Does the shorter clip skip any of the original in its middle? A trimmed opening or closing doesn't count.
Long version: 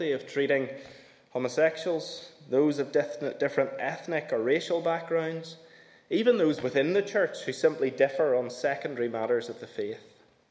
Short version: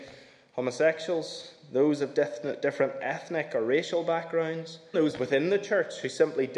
yes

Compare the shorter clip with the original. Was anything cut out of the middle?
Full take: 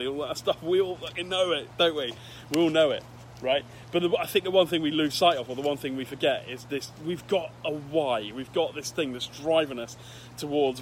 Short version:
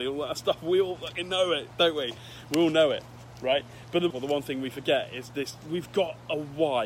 yes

